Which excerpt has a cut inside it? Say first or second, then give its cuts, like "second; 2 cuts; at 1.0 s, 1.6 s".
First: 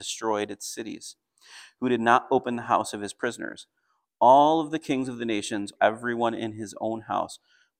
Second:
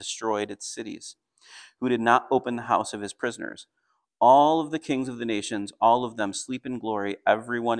first; 1 cut; at 5.8 s